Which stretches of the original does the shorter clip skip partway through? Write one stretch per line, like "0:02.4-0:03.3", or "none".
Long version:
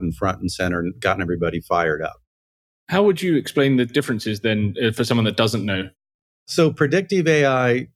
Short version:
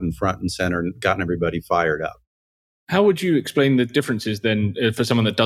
none

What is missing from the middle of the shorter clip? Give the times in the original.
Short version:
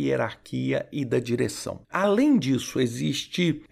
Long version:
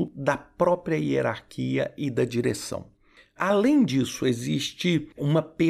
0:02.9-0:03.3

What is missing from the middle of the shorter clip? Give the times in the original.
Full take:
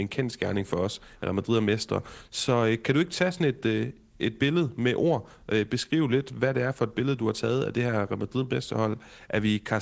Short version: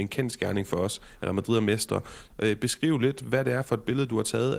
0:02.3-0:05.4

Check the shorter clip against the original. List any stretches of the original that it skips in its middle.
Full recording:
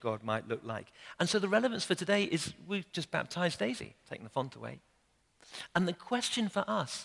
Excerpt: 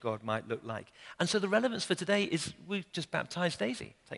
none

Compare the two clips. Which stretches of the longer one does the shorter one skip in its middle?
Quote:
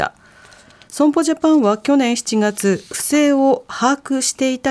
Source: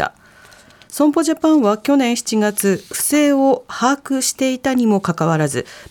none

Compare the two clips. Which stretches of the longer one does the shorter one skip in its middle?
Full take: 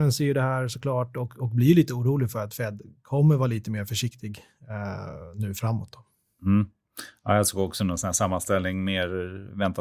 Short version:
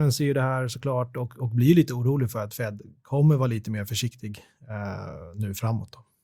none

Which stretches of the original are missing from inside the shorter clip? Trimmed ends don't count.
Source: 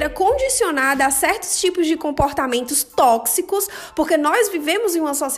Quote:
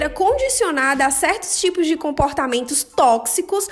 none

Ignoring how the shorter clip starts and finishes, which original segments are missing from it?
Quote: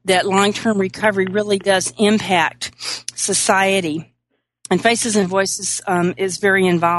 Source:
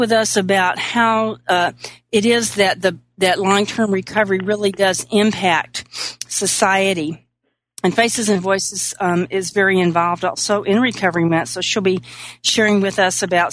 none

